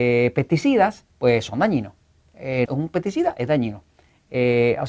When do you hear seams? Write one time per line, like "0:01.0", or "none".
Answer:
0:01.1
0:02.6